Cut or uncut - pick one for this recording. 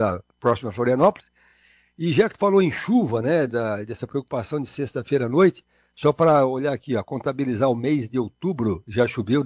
uncut